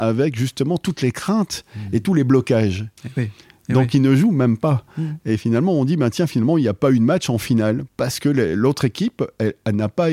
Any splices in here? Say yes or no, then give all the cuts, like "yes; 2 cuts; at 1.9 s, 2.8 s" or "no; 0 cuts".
yes; 1 cut; at 3.0 s